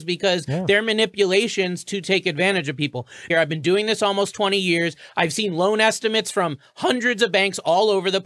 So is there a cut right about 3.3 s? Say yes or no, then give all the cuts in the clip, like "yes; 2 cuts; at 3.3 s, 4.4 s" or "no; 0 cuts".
yes; 1 cut; at 3.3 s